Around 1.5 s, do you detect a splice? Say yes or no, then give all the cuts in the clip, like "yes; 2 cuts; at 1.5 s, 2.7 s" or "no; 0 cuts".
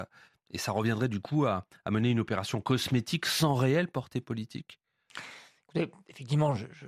no; 0 cuts